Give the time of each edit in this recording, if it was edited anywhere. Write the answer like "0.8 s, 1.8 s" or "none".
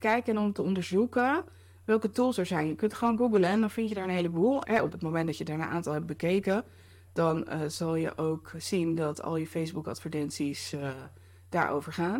4.6 s